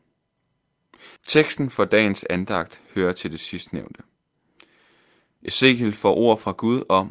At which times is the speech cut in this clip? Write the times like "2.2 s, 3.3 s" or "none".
1.2 s